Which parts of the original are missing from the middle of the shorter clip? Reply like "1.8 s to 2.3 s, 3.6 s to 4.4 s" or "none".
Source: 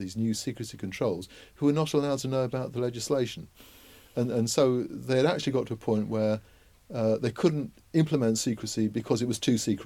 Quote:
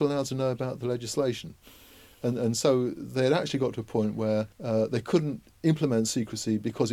6.5 s to 6.8 s

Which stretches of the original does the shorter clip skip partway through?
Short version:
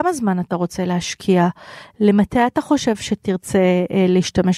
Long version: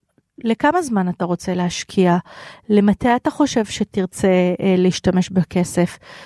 none

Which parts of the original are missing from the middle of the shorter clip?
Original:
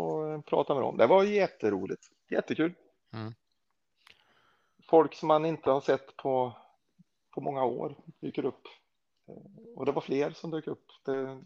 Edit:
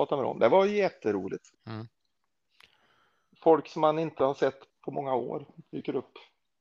2.1 s to 3.0 s, 6.2 s to 7.2 s

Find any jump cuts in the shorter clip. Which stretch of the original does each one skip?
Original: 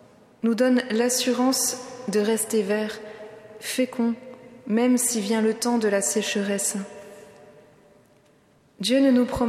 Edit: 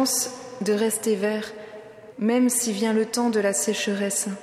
3.6 s to 4.6 s

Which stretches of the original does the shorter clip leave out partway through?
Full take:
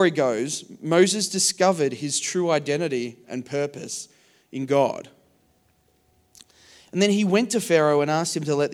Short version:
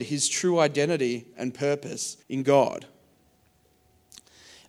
4.1 s to 4.5 s

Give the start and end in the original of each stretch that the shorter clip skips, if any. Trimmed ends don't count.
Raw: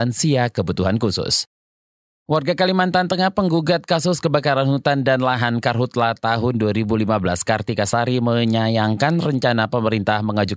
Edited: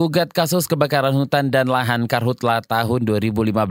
none

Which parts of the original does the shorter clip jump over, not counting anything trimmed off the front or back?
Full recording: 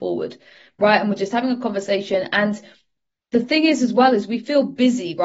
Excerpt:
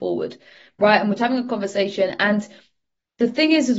1.2 s to 1.3 s

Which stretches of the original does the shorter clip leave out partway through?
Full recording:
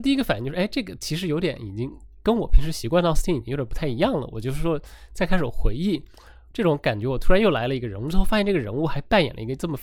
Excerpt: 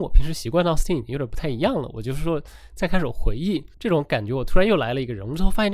6.1 s to 6.5 s

